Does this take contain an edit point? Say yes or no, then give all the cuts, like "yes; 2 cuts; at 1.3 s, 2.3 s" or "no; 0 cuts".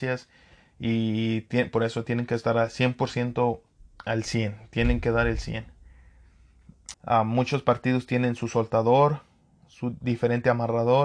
yes; 1 cut; at 6.9 s